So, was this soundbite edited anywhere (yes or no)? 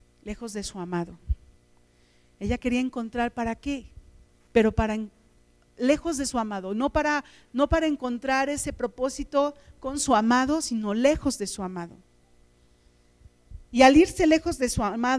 yes